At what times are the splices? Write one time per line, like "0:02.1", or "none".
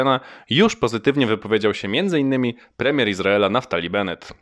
none